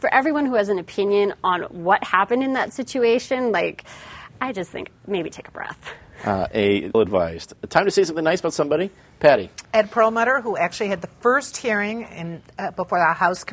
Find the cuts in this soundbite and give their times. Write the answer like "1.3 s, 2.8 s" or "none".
6.9 s, 9.6 s